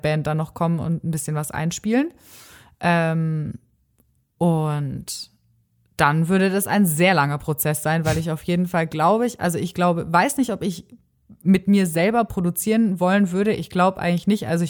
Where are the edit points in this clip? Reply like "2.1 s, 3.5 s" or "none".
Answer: none